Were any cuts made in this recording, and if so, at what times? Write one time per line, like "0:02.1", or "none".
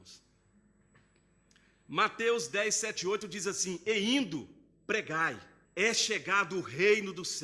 0:05.6